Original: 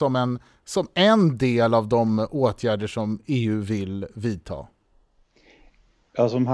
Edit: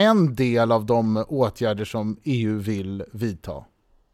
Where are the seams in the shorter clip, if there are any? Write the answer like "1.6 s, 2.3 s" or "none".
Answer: none